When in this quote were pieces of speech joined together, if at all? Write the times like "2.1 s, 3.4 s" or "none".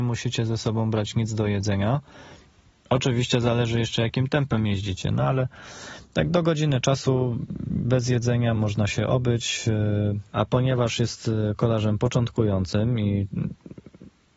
8.5 s, 10.3 s